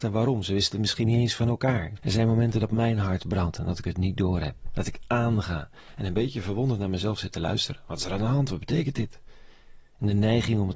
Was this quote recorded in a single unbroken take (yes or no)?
no